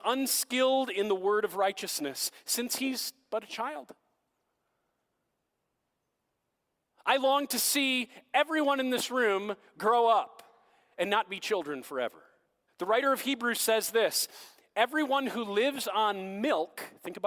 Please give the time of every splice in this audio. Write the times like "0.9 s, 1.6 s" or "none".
12.7 s